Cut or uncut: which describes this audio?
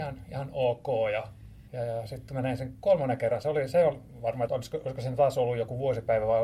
cut